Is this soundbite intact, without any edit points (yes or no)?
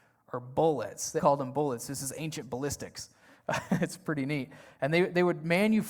no